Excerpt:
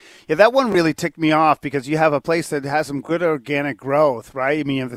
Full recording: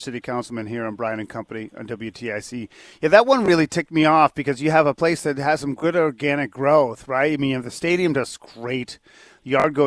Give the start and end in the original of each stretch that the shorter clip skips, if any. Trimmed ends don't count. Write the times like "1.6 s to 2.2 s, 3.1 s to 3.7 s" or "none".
none

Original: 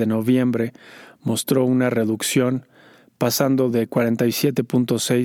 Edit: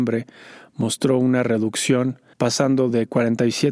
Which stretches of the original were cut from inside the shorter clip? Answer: 2.8 s to 3.1 s

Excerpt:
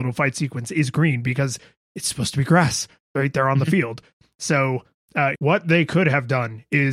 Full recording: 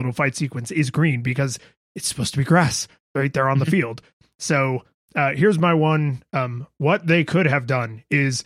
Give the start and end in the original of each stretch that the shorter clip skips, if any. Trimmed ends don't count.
5.3 s to 6.7 s

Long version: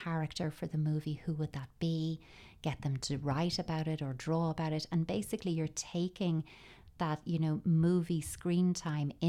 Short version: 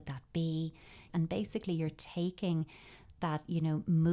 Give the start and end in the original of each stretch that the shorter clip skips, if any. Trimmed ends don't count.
2.6 s to 4.9 s

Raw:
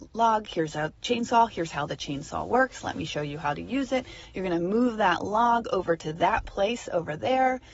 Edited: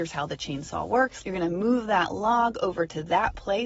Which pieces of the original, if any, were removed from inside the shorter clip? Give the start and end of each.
2.8 s to 4.3 s

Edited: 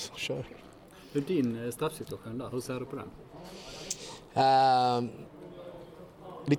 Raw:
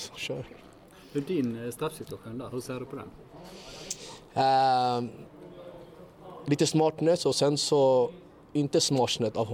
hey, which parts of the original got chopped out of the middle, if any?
none

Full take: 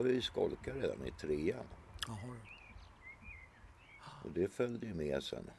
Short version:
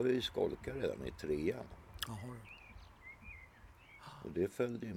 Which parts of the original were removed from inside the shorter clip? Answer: none

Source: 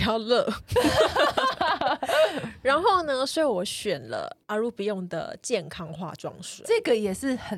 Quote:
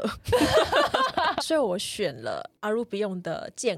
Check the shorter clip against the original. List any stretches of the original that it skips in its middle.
1.8 s to 3.3 s

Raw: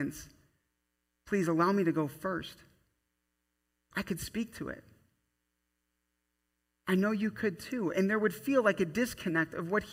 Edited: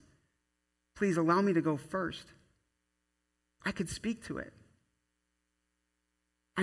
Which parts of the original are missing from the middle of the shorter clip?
none

